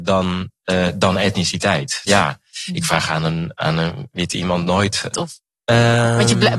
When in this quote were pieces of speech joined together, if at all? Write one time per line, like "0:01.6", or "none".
0:02.1
0:05.1